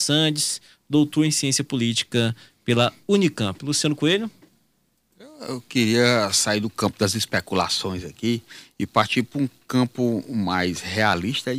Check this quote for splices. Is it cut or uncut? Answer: uncut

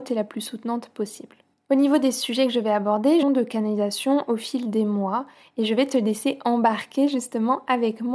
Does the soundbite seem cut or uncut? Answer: cut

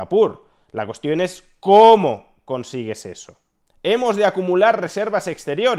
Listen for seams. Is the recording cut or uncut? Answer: uncut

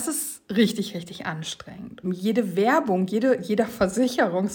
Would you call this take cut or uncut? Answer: cut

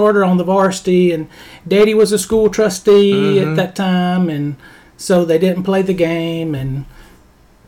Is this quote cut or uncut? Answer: uncut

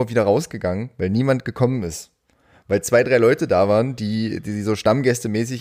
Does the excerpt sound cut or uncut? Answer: uncut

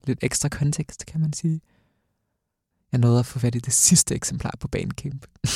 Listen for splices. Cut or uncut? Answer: cut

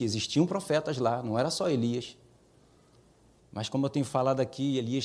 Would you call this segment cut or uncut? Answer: cut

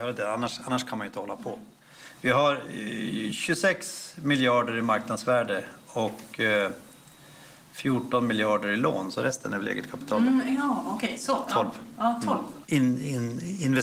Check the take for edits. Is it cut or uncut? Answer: cut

